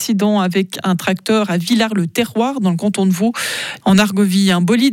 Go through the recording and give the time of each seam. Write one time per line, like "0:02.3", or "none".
0:03.8